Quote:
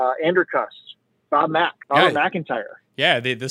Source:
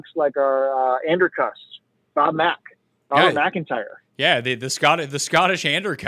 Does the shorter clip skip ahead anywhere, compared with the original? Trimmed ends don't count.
yes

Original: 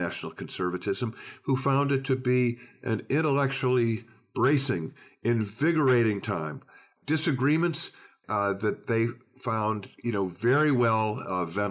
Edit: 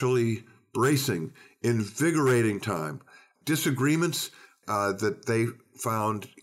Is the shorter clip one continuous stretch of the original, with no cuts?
yes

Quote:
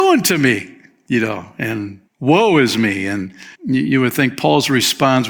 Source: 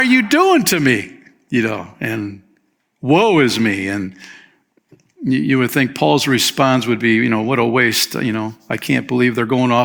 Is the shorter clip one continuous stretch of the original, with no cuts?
no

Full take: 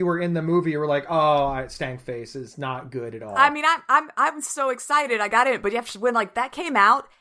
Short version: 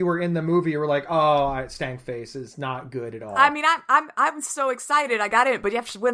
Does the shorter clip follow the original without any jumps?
yes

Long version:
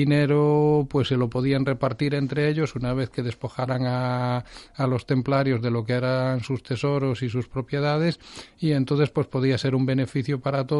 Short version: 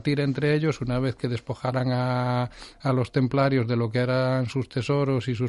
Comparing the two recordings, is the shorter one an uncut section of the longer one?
yes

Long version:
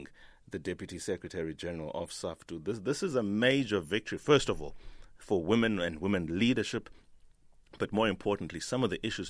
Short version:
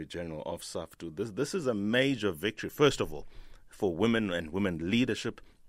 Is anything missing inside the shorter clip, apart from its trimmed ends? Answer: no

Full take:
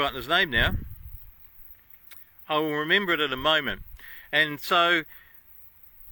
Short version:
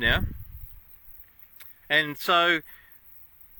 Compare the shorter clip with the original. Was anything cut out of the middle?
yes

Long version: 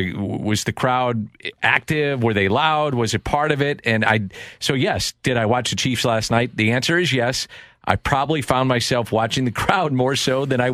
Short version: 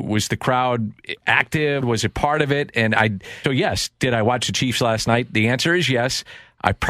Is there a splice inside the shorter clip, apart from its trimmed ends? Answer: yes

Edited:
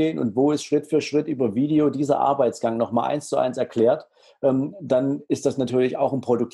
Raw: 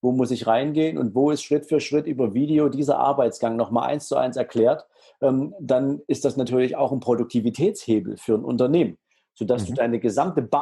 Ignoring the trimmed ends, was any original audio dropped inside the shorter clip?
no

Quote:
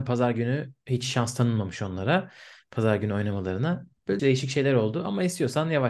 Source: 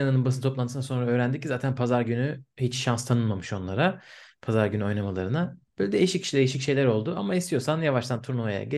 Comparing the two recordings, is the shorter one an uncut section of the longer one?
no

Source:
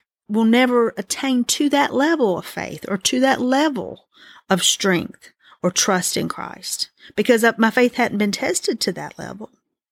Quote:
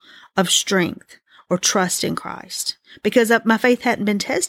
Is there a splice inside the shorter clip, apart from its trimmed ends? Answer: no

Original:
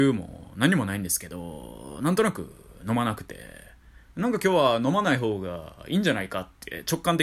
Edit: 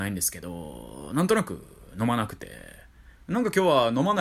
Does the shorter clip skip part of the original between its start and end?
no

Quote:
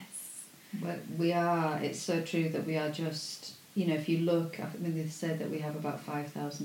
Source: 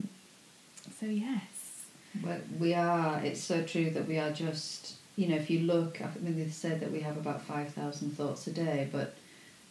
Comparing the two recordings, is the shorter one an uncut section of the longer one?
yes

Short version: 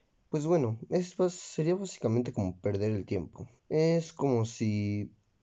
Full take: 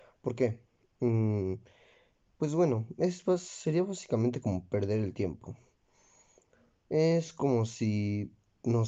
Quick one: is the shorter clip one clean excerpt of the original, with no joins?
no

